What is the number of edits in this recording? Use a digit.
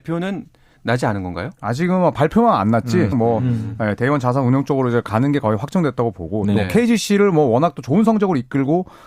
2